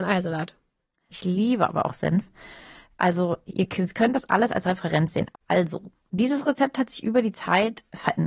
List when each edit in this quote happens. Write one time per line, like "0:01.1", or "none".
0:01.1
0:05.3